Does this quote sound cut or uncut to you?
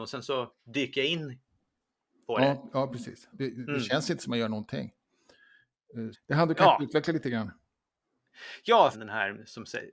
cut